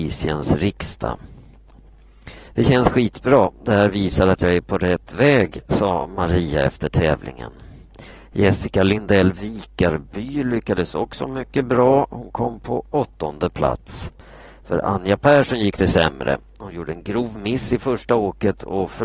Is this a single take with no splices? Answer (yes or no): no